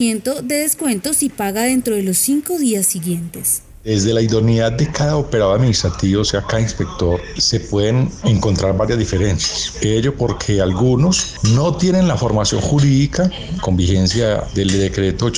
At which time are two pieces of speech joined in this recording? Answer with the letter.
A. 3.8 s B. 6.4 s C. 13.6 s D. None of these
C